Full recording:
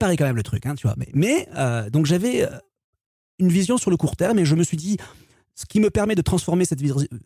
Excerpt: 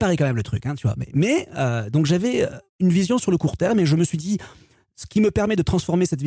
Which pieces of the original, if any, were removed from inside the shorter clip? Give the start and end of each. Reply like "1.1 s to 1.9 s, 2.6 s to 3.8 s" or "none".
2.7 s to 3.3 s